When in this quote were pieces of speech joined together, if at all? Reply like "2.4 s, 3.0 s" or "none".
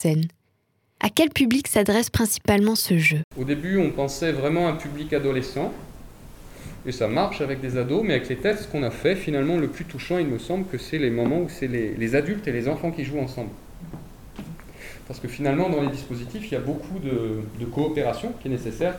none